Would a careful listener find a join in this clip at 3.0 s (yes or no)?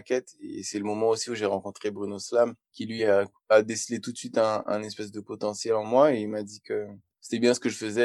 no